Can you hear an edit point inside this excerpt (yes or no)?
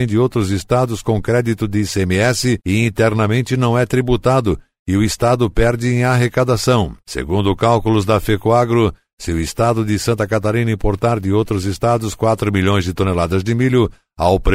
no